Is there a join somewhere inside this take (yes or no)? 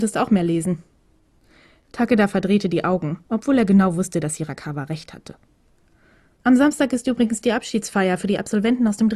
yes